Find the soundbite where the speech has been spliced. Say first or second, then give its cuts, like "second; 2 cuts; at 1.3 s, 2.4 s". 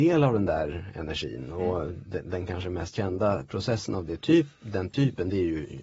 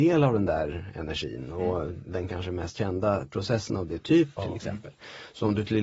second; 2 cuts; at 2.0 s, 4.4 s